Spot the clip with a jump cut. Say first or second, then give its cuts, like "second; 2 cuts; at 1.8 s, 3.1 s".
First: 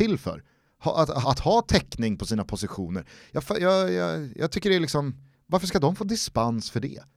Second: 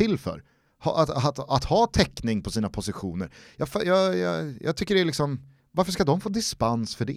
first; 1 cut; at 1.2 s